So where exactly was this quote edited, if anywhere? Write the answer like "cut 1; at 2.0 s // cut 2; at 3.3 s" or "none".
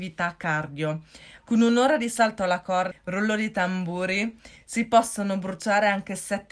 cut 1; at 1.4 s // cut 2; at 2.9 s